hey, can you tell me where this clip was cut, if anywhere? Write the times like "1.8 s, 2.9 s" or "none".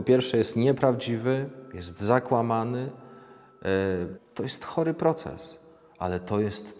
4.2 s